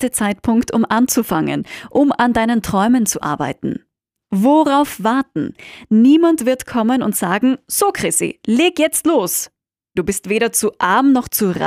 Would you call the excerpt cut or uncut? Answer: cut